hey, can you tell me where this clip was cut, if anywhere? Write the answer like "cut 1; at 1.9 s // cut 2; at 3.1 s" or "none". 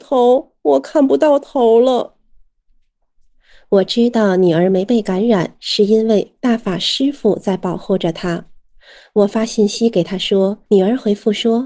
cut 1; at 10.7 s